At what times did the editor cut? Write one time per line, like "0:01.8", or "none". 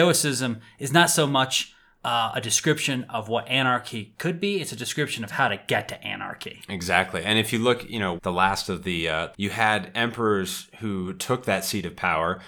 0:08.2
0:09.3